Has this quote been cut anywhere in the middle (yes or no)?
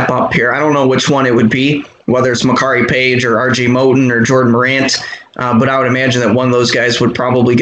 no